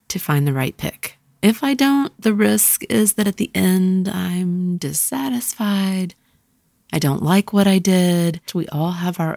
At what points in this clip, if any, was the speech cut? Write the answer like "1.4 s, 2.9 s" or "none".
8.5 s